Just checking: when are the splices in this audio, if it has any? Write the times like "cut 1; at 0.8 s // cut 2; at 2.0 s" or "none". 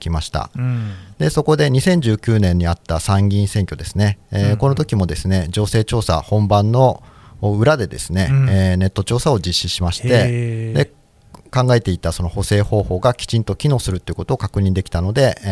none